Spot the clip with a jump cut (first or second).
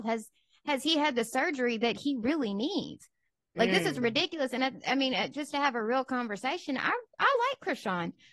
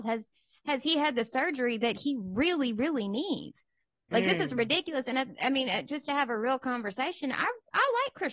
first